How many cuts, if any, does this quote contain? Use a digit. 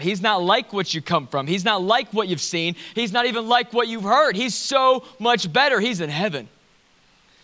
0